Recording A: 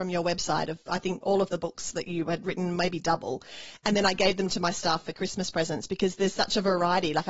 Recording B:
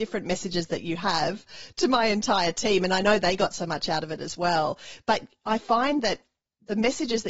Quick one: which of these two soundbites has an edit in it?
A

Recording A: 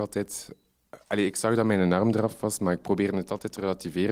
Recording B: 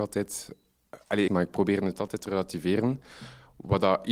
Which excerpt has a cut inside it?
B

